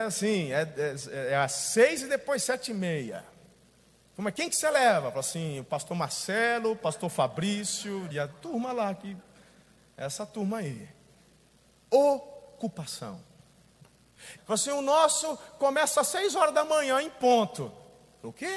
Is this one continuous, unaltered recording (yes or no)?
no